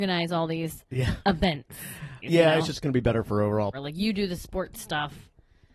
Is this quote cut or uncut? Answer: cut